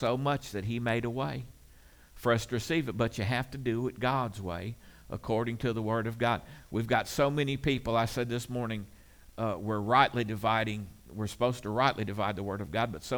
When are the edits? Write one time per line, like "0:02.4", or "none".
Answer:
none